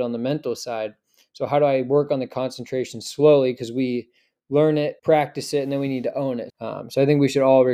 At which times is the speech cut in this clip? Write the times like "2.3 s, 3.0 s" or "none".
5.0 s, 6.5 s